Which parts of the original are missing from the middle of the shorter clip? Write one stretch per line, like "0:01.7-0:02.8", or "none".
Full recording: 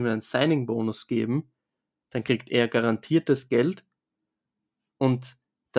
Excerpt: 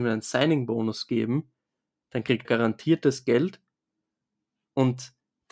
0:02.4-0:02.7

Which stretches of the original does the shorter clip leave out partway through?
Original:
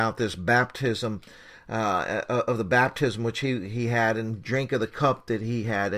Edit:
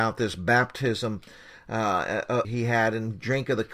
0:02.4-0:03.7

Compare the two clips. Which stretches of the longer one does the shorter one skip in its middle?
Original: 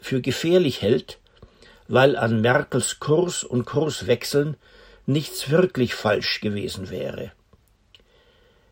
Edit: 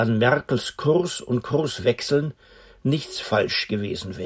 0:05.5-0:06.0

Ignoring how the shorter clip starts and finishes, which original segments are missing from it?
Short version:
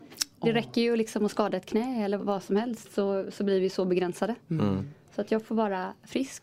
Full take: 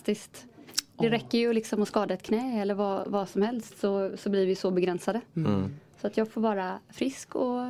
0:02.8-0:03.0

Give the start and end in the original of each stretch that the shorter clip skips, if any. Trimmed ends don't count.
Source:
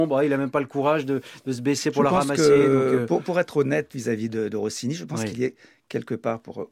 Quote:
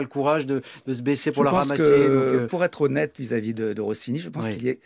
0:03.1-0:03.2

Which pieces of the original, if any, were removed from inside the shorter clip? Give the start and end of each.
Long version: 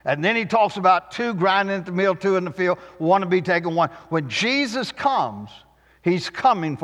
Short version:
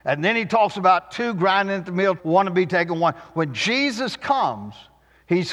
0:02.2-0:02.9

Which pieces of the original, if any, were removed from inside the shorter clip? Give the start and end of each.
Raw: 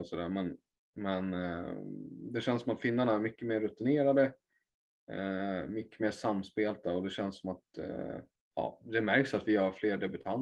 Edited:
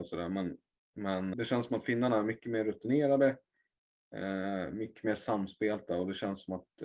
0:01.3-0:02.3

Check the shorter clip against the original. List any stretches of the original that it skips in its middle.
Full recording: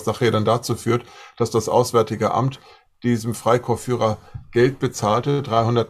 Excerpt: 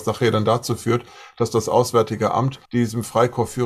0:02.6-0:03.0

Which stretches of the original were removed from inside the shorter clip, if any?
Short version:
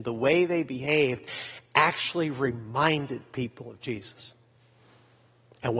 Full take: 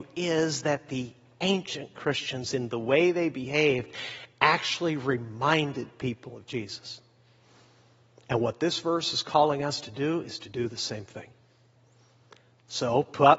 none

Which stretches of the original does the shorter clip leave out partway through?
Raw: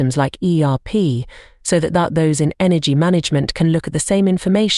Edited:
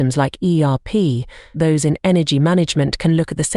0:01.5-0:02.1

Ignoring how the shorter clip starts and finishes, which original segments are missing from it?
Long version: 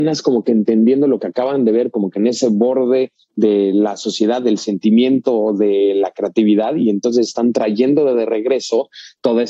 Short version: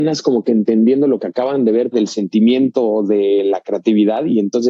0:01.9-0:04.4

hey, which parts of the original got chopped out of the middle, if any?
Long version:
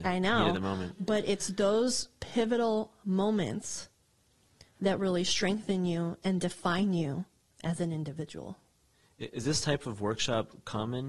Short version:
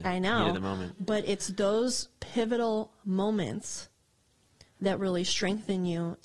none

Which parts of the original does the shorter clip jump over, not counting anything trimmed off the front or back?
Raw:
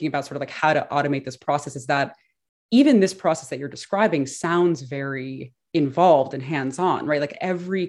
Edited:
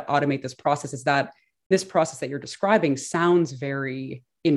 0:02.5-0:03.0

